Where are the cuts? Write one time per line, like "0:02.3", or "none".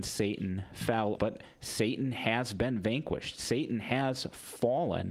0:01.2